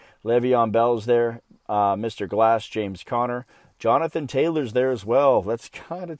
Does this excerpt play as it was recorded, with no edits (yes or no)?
yes